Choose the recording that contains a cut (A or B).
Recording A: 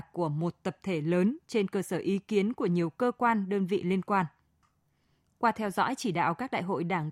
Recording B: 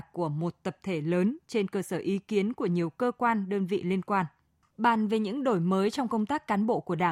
B